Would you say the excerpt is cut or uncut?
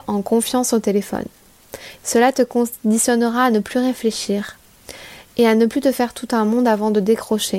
cut